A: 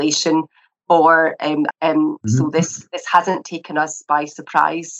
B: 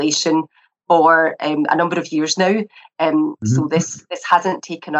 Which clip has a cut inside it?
A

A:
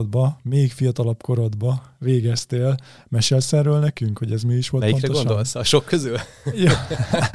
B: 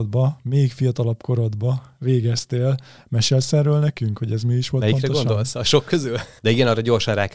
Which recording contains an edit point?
B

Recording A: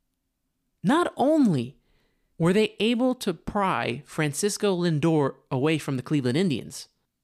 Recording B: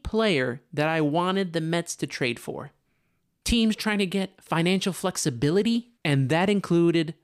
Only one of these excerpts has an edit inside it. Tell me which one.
B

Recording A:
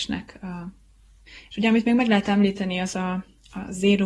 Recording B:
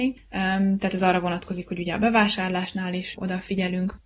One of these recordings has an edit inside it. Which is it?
B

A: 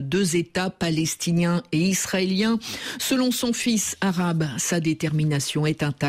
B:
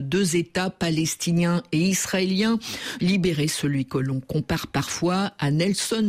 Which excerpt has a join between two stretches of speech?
B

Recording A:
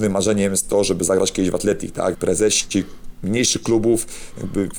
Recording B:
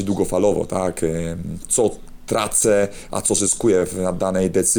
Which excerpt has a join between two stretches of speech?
A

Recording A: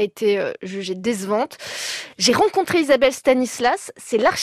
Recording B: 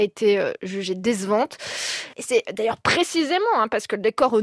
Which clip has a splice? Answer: B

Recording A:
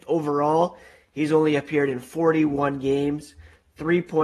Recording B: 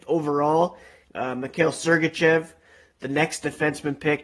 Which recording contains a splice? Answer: B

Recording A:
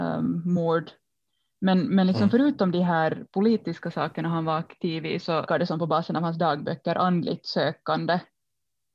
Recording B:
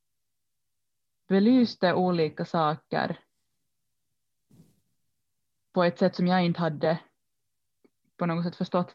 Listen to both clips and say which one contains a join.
A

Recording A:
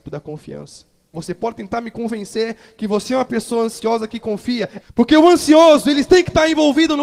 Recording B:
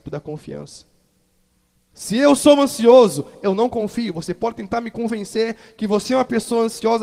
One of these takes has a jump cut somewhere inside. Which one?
A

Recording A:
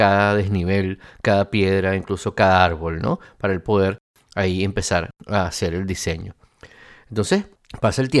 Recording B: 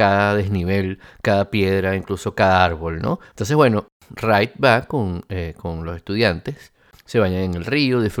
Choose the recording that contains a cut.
B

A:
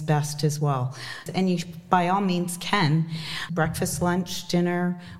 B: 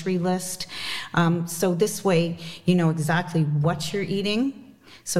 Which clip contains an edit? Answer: A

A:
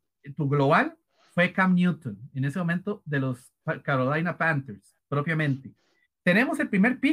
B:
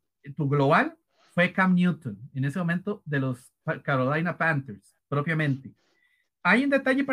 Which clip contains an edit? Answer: A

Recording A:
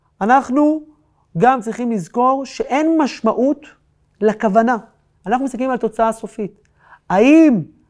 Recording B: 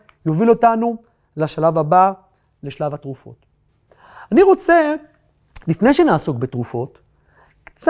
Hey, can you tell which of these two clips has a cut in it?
A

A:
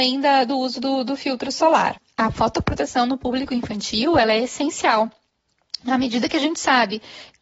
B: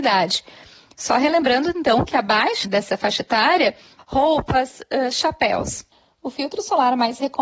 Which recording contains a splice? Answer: B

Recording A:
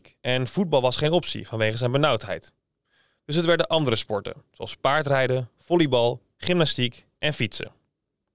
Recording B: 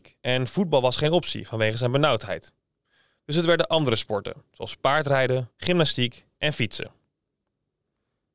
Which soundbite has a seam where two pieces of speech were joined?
B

